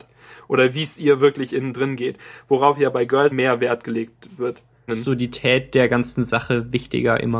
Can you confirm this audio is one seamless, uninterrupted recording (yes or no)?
no